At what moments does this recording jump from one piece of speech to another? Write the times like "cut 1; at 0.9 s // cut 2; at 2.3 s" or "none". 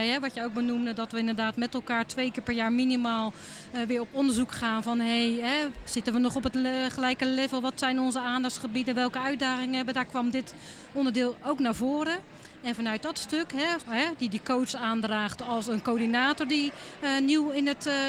cut 1; at 13.8 s // cut 2; at 15.4 s